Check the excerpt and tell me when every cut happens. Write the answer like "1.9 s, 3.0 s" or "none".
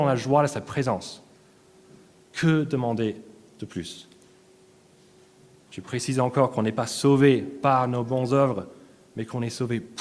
none